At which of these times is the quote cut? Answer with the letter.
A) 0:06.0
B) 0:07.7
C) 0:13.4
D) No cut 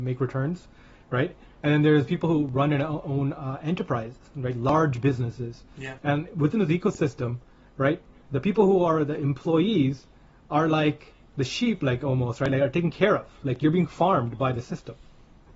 A